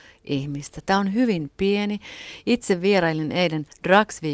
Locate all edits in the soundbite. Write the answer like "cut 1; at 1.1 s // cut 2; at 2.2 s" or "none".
none